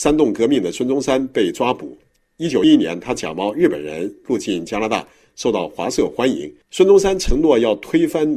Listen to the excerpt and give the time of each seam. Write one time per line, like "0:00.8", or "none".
0:02.6
0:06.6